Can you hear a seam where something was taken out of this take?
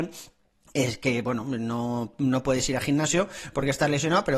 no; 0 cuts

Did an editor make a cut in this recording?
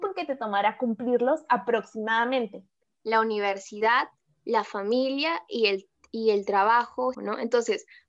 yes; 2 cuts; at 2.8 s, 7.1 s

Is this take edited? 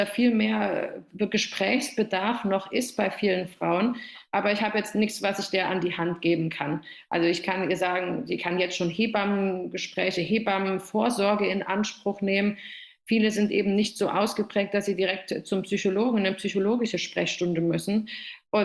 no; 0 cuts

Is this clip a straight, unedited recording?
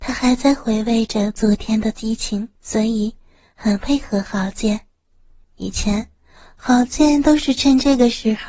no; 2 cuts; at 2.6 s, 5.4 s

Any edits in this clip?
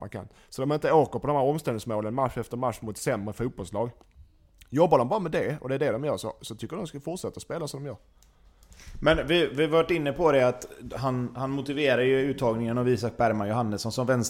no; 0 cuts

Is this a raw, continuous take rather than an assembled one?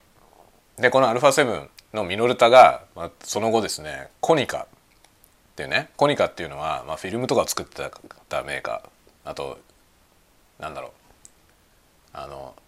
yes; 0 cuts

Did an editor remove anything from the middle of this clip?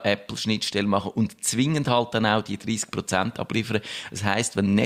no; 0 cuts

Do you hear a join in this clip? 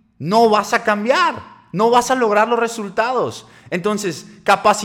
no; 0 cuts

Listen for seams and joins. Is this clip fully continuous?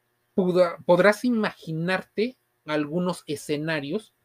yes; 0 cuts

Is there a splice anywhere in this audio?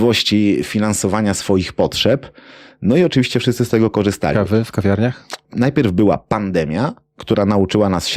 yes; 2 cuts; at 4.3 s, 5.4 s

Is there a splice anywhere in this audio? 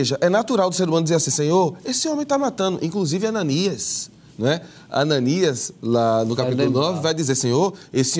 no; 0 cuts

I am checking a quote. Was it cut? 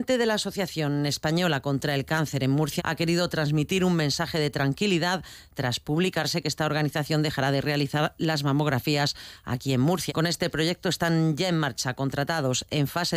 yes; 2 cuts; at 2.8 s, 10.1 s

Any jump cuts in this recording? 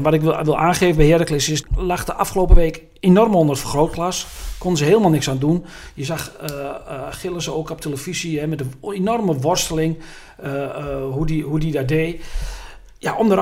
yes; 1 cut; at 1.6 s

